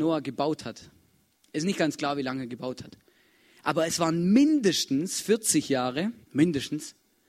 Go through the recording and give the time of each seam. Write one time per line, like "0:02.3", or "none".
0:06.2

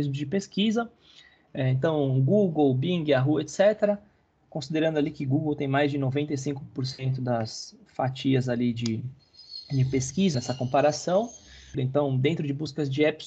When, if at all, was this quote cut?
0:10.3
0:11.7

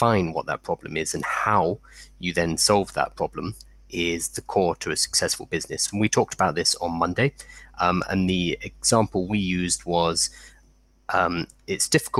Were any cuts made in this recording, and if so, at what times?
none

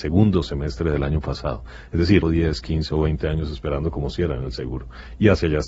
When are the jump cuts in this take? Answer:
0:02.2

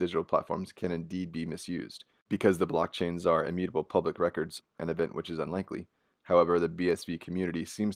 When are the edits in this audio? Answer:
0:04.6

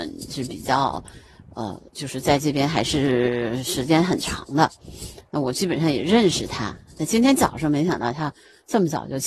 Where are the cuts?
none

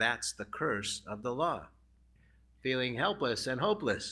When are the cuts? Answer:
0:02.2

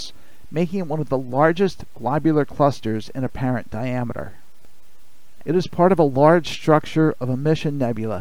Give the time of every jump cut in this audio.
0:05.4

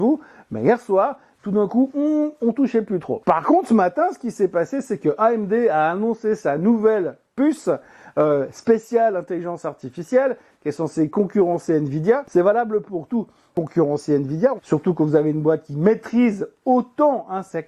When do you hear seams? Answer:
0:12.2
0:13.5
0:14.6

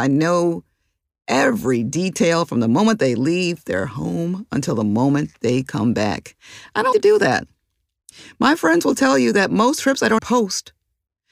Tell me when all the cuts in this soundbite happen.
0:06.9
0:10.2

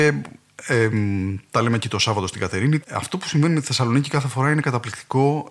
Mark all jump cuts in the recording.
0:02.8

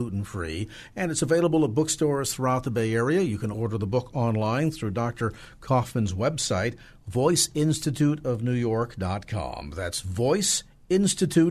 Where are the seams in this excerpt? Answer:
0:03.5

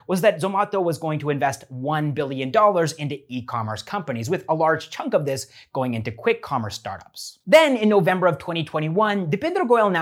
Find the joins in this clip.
0:07.4

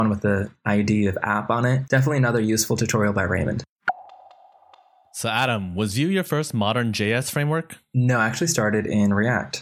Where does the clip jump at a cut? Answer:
0:01.9

